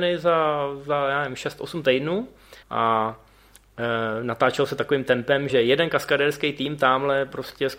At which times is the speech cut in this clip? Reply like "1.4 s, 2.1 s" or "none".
2.6 s, 5.5 s